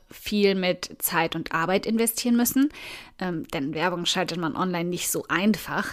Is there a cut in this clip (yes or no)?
no